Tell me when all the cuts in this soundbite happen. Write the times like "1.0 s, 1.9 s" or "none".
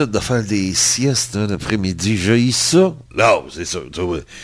3.1 s

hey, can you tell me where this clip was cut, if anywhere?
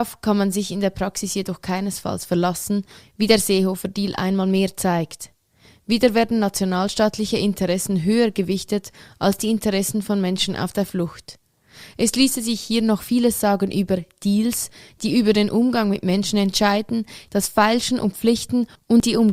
17.3 s

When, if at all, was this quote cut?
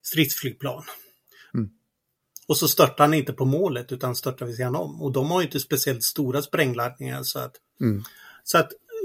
1.5 s, 7.8 s

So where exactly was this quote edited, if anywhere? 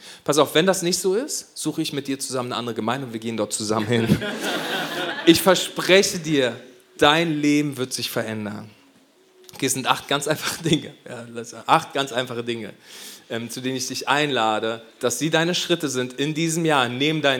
none

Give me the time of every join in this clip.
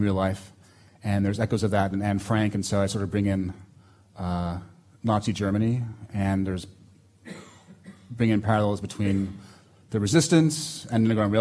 none

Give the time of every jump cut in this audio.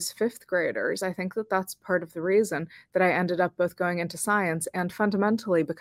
none

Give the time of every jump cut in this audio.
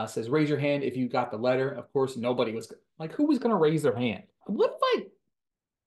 4.4 s

